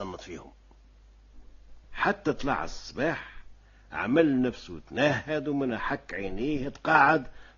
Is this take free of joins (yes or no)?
no